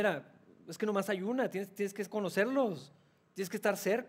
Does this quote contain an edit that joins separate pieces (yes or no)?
no